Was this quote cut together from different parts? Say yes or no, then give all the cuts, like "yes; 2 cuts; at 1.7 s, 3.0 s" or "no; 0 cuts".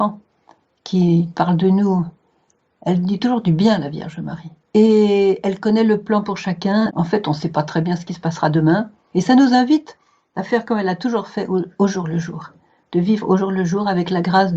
yes; 3 cuts; at 4.7 s, 6.9 s, 9.1 s